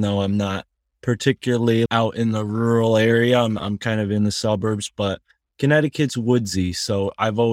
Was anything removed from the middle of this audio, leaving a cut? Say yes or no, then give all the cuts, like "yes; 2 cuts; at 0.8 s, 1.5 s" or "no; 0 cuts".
yes; 1 cut; at 1.9 s